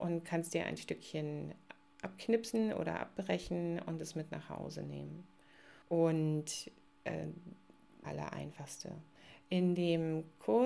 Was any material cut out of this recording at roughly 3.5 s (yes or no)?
no